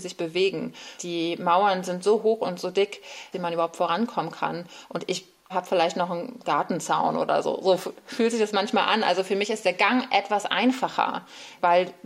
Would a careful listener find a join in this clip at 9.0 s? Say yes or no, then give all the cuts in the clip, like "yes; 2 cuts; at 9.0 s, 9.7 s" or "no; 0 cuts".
no; 2 cuts; at 1.0 s, 3.3 s